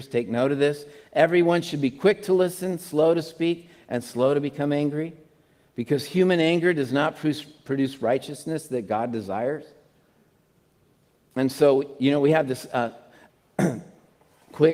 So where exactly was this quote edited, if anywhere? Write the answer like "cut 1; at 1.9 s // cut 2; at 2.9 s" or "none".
none